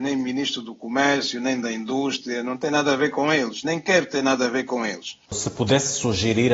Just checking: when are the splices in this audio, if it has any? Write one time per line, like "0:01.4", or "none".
0:05.3